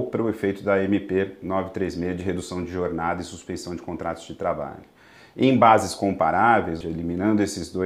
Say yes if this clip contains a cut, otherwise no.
yes